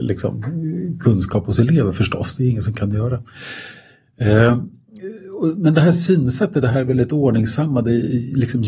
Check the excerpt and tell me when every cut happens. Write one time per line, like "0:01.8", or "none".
none